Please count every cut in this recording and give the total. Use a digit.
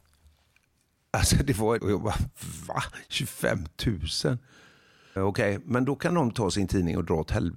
2